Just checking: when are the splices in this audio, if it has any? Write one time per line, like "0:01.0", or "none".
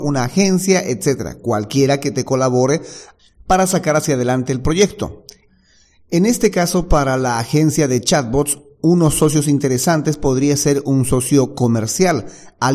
none